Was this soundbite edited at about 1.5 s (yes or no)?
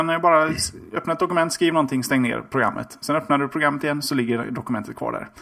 no